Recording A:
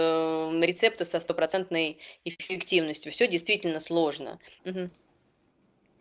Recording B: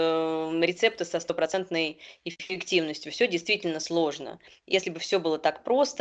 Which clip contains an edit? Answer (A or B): A